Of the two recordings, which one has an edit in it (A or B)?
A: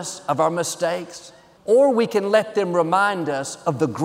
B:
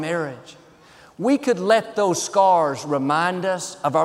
A